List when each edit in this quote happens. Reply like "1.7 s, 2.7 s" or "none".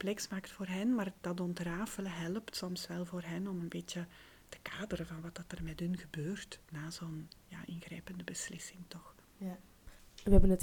none